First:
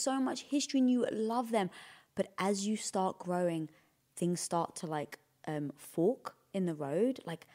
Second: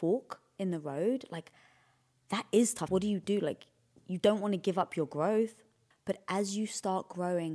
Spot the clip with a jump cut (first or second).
second